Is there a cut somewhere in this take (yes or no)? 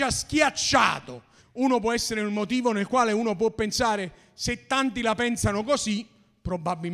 yes